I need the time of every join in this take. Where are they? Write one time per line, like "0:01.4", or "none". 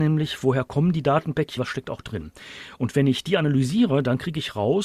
0:01.6

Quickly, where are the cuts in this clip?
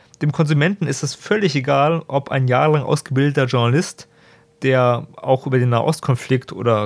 none

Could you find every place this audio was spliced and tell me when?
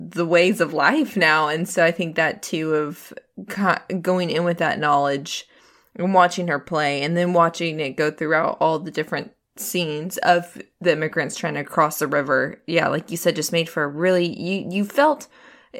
none

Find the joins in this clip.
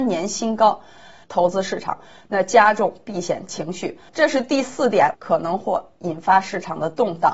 0:01.2
0:04.1
0:05.1

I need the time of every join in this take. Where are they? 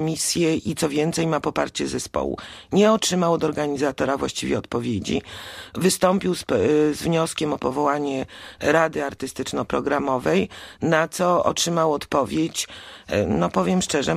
none

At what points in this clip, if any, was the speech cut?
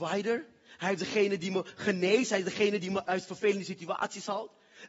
0:03.0

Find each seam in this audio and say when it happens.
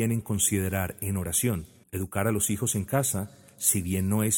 0:01.8

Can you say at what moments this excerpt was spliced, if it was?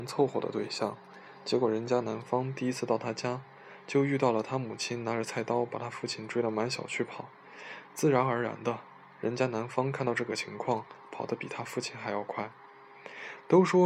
none

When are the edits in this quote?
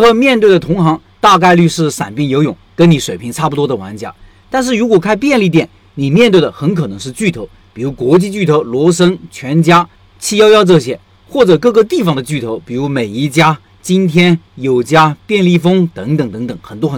none

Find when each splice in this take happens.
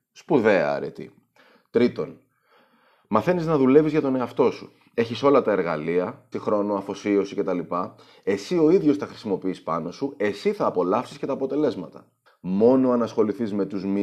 0:06.3
0:12.3

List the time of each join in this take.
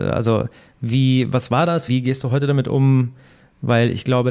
0:01.9

